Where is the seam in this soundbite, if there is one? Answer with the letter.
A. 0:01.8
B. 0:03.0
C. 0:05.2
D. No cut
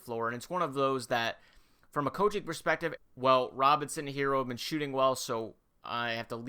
B